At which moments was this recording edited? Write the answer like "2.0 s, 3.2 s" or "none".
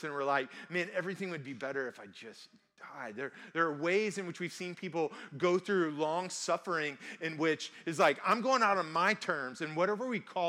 none